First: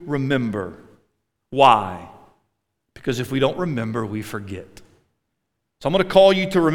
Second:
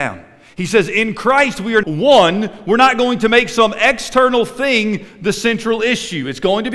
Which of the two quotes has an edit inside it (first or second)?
second